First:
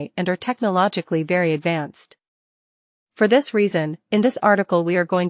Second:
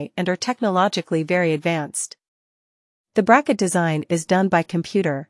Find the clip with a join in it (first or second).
first